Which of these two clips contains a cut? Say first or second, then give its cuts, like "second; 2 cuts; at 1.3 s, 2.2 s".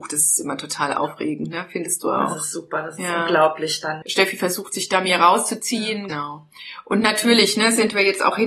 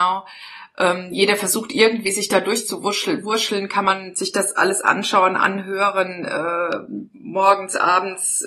first; 2 cuts; at 4.0 s, 6.1 s